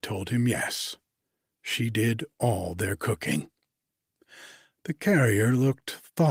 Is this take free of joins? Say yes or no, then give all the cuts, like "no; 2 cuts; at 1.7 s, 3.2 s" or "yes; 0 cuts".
yes; 0 cuts